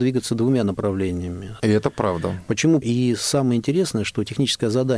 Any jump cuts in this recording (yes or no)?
yes